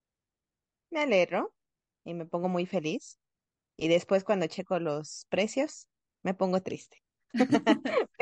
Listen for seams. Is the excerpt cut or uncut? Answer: uncut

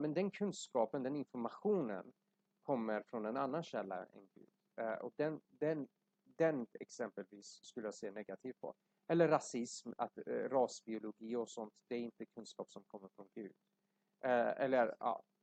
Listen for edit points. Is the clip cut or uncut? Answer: uncut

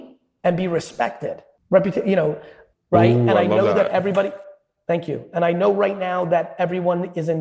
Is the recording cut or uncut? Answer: cut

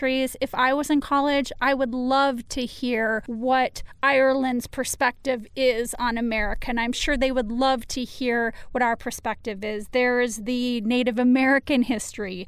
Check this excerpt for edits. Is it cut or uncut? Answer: uncut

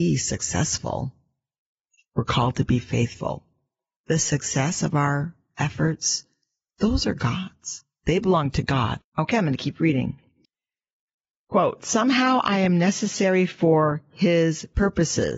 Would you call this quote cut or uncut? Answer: cut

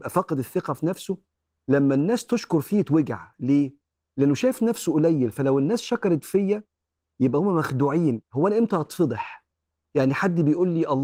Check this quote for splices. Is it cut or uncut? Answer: uncut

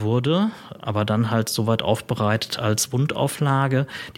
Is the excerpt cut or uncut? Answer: cut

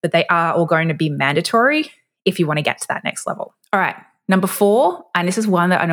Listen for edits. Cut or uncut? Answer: uncut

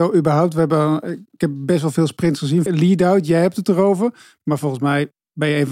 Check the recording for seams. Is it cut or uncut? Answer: cut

